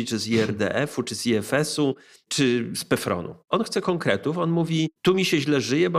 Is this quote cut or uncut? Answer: uncut